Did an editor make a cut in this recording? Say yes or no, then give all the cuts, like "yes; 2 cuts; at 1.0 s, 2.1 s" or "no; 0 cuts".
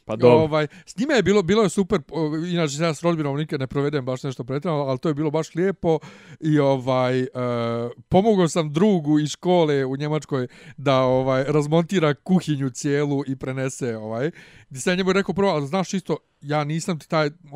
no; 0 cuts